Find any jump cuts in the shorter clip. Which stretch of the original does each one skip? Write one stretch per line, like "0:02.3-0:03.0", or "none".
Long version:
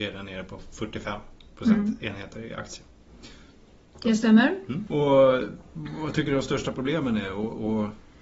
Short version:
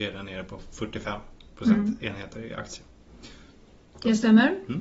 none